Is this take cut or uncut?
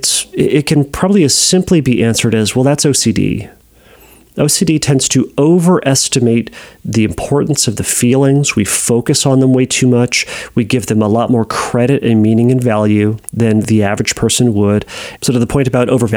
cut